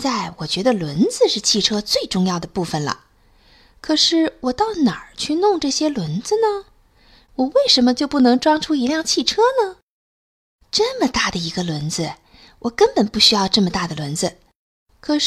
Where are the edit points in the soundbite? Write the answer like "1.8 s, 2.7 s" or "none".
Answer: 7.2 s